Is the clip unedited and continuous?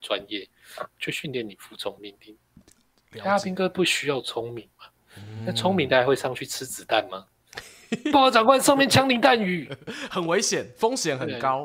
yes; 0 cuts

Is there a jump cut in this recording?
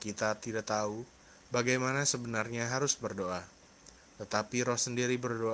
no; 0 cuts

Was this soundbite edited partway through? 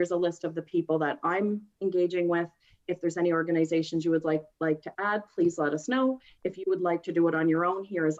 no; 0 cuts

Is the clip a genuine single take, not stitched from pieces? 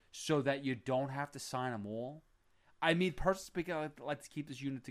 yes; 0 cuts

